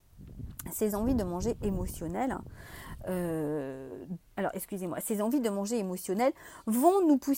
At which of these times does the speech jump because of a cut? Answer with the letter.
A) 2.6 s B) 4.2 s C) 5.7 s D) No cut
B